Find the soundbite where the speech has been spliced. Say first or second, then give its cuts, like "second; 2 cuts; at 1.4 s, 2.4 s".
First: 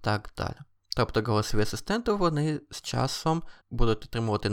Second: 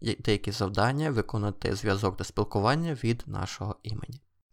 first; 1 cut; at 3.6 s